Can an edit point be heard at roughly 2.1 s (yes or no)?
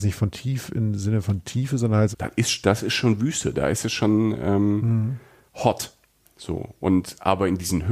yes